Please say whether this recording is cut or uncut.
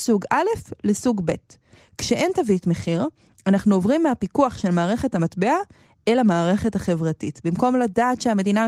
uncut